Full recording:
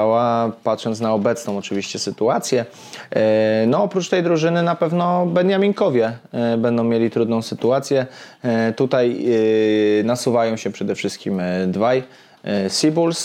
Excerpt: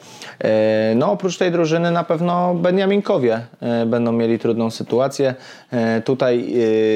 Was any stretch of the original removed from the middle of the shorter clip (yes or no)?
no